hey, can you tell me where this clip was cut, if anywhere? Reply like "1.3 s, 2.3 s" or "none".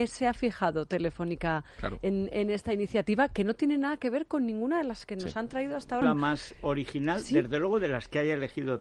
6.0 s